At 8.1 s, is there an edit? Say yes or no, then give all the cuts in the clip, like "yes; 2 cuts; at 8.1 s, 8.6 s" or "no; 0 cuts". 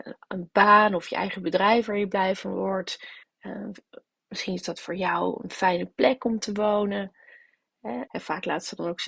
yes; 2 cuts; at 3.2 s, 8.1 s